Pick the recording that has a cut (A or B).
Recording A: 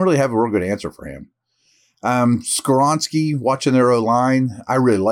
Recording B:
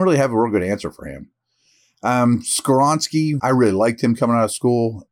B